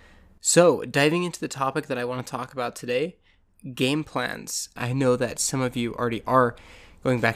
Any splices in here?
yes; 1 cut; at 4.8 s

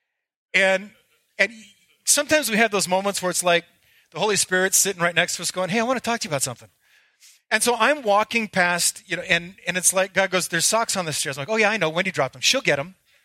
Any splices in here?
no; 0 cuts

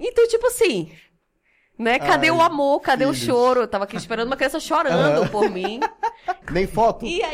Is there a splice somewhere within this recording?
yes; 1 cut; at 6.4 s

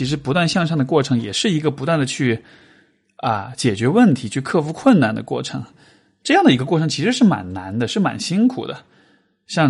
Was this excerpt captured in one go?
yes; 0 cuts

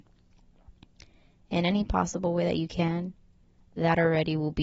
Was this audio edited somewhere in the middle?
no; 0 cuts

